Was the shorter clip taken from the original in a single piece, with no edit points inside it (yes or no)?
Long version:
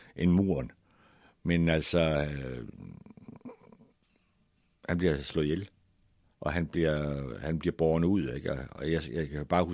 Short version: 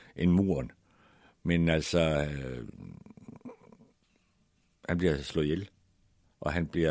yes